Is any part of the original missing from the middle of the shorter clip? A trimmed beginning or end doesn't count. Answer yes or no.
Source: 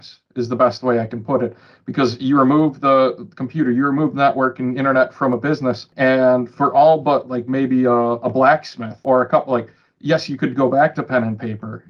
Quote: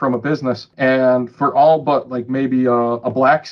no